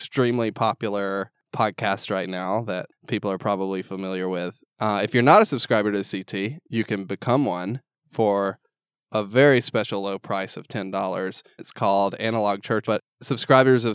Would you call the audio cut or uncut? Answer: cut